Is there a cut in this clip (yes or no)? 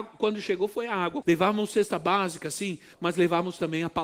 yes